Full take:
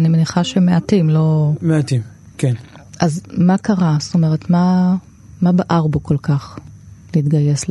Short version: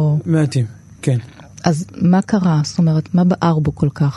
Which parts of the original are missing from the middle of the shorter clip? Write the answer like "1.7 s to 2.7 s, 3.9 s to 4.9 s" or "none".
4.4 s to 5.4 s